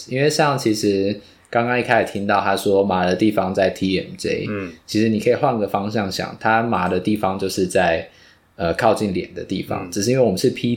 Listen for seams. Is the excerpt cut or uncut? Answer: uncut